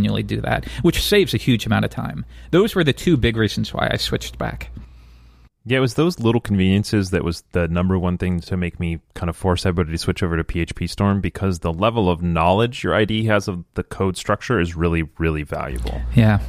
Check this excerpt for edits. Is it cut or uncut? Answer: uncut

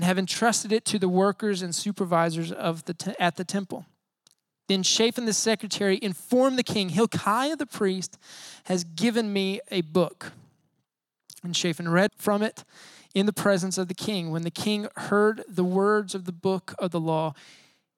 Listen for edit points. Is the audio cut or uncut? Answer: cut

